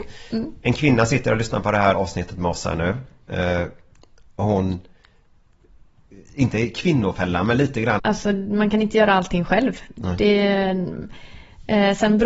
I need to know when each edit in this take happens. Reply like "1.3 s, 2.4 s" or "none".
1.9 s, 8.0 s